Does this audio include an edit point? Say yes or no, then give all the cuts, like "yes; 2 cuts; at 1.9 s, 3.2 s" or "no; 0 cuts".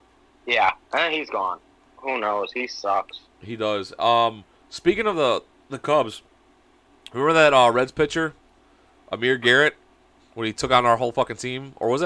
yes; 1 cut; at 1.9 s